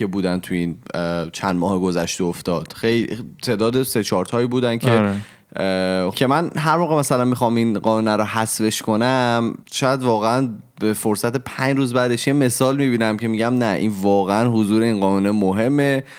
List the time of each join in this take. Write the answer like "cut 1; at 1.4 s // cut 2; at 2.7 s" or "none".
cut 1; at 6.1 s // cut 2; at 9.6 s